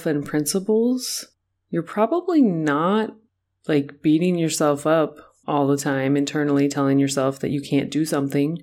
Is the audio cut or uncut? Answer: uncut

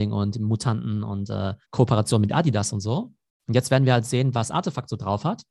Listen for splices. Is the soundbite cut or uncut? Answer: cut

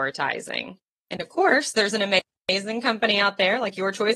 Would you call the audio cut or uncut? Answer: cut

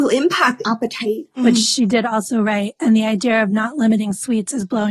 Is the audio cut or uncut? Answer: cut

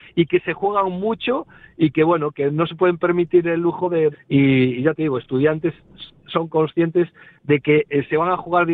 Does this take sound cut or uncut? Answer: cut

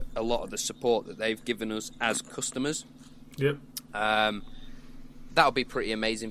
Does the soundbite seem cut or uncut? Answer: uncut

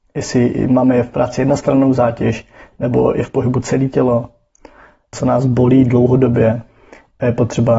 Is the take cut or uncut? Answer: cut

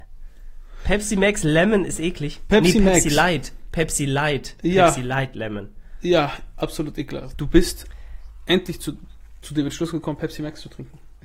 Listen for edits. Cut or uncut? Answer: cut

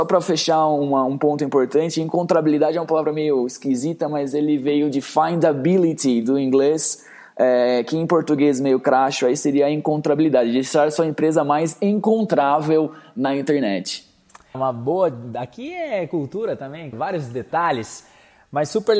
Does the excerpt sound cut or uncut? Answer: cut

